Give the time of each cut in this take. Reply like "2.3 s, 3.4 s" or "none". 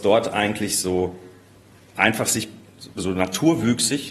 none